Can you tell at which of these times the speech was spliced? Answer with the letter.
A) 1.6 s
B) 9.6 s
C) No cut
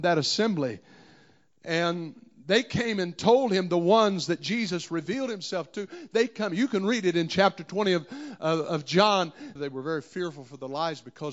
B